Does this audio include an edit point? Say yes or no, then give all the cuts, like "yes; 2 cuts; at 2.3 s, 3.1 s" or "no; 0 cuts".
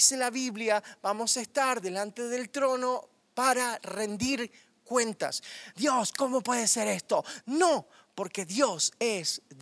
yes; 2 cuts; at 5.7 s, 7.4 s